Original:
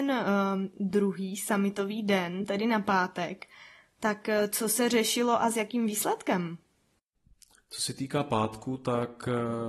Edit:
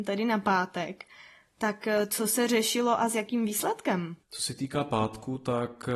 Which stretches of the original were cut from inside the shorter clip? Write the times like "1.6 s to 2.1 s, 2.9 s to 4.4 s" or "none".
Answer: 6.6 s to 7.6 s